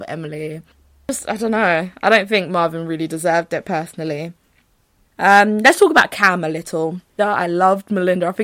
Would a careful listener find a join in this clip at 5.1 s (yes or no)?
yes